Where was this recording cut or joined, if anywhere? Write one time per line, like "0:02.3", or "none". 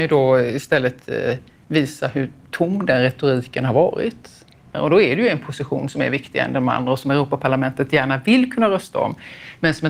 0:04.7